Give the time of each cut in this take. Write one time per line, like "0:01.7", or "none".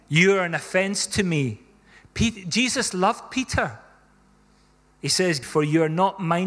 0:05.4